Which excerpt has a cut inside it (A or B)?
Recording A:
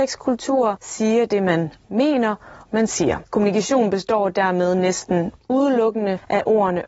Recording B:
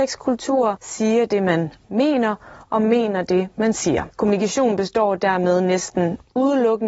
A